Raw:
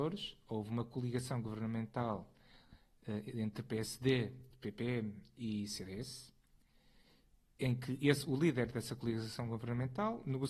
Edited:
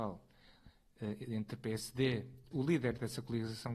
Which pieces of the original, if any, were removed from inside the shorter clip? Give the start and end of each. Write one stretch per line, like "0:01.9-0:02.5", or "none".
0:04.6-0:08.2